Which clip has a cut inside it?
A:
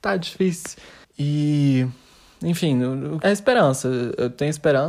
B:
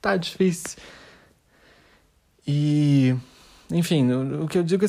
A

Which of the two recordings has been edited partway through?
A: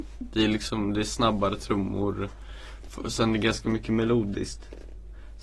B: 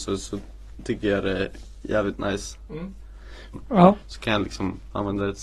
B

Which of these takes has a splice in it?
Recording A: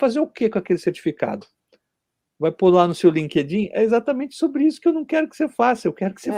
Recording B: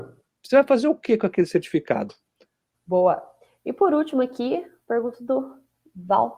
B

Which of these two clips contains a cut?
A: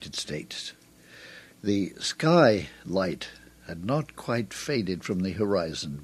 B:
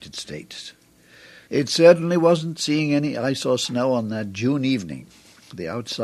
B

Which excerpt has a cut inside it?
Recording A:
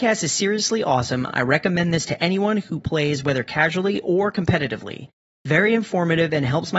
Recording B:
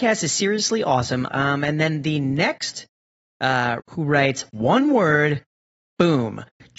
B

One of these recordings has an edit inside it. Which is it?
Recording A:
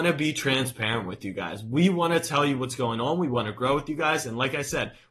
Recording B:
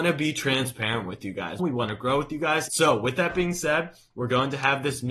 B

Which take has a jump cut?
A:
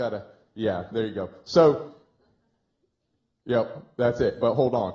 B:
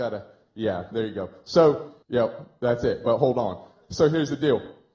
B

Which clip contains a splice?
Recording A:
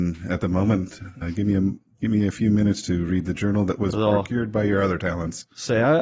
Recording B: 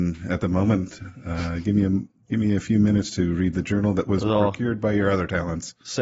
A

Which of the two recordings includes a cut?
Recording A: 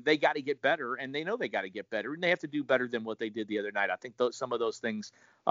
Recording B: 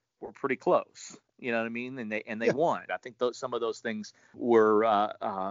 B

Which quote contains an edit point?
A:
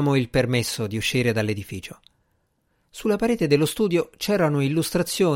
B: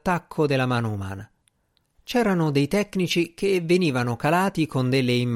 B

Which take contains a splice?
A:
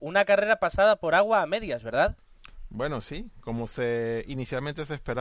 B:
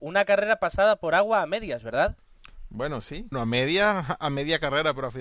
B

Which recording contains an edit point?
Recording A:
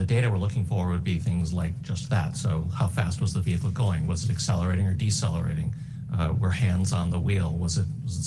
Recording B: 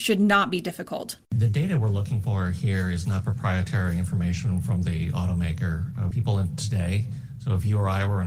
B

